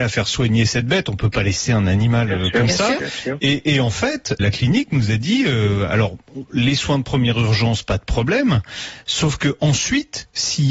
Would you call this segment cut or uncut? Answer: cut